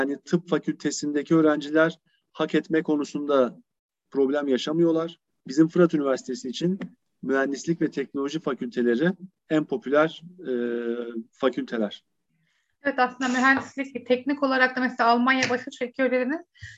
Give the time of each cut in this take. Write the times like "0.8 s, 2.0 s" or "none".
5.3 s